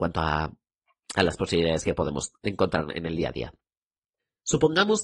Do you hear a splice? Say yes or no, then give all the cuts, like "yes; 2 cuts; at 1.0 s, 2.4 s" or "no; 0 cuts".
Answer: no; 0 cuts